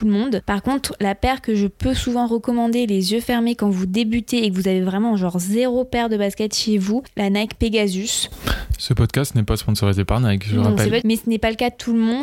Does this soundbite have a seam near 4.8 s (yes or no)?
no